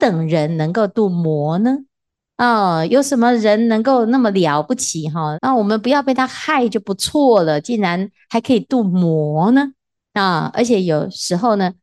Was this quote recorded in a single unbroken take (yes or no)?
no